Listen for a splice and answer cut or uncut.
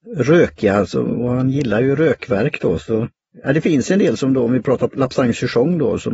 uncut